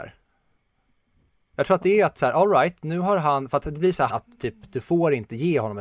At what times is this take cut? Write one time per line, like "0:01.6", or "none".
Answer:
0:04.1